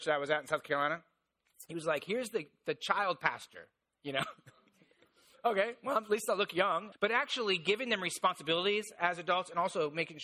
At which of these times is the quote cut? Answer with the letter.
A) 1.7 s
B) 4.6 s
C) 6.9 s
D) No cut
C